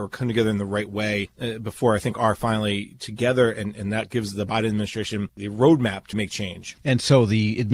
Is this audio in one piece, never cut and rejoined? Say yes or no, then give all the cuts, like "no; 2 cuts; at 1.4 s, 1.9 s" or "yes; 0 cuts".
no; 1 cut; at 6.1 s